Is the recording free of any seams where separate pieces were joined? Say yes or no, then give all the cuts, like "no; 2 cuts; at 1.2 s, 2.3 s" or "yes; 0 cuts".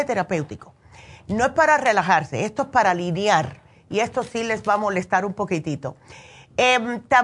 yes; 0 cuts